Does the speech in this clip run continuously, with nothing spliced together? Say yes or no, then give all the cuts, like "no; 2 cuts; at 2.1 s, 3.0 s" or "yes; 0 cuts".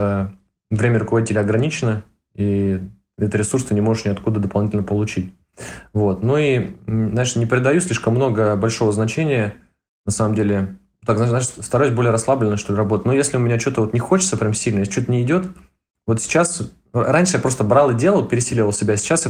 yes; 0 cuts